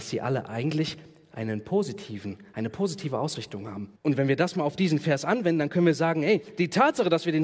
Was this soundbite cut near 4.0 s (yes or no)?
yes